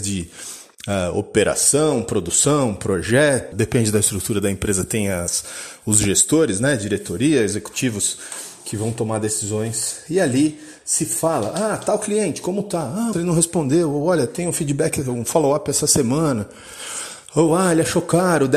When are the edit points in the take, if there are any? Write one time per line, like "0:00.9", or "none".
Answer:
0:03.5
0:13.1